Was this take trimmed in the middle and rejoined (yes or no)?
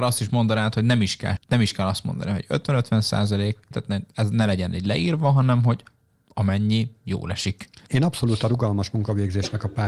yes